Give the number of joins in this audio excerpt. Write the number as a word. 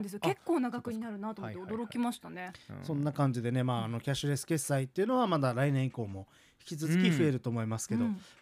zero